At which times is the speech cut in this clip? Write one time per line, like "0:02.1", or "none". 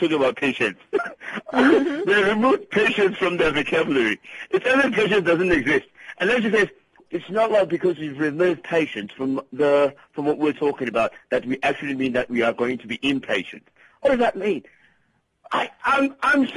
0:07.0